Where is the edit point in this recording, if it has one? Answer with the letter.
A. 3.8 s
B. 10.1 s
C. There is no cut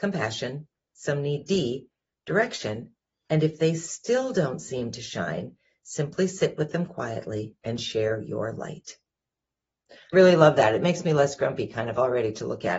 B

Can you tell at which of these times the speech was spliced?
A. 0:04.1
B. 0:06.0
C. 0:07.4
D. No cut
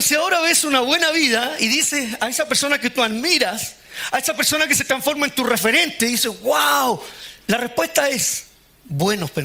C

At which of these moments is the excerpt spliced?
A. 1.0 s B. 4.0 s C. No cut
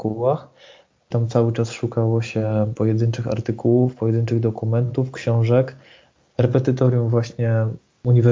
A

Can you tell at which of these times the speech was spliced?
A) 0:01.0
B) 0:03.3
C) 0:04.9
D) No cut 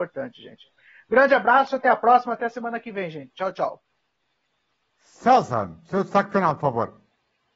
D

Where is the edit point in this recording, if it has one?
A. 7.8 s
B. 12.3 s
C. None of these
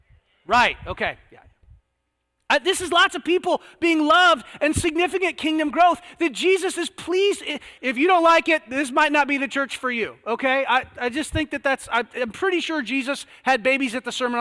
A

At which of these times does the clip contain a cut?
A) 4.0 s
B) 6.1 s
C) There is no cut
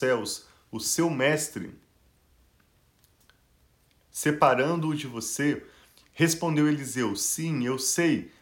C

